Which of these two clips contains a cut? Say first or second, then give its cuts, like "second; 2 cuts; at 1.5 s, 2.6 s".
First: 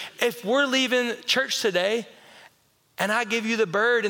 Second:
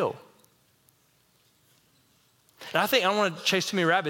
second; 1 cut; at 2.5 s